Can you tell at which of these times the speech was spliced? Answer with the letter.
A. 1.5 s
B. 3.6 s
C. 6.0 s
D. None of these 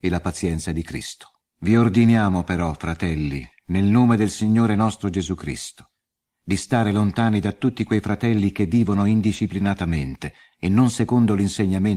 A